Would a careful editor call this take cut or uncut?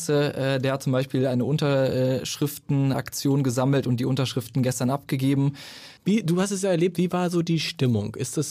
cut